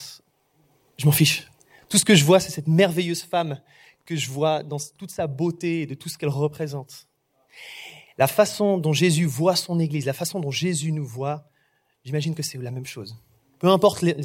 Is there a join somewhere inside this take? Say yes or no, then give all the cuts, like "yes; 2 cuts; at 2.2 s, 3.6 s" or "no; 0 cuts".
no; 0 cuts